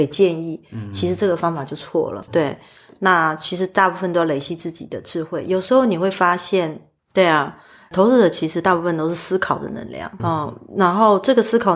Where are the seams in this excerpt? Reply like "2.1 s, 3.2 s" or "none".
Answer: 2.3 s, 7.0 s, 10.2 s